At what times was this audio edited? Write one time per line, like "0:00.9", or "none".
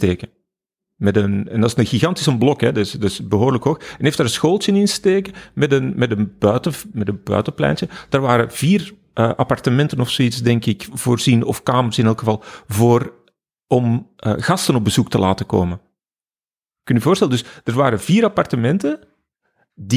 none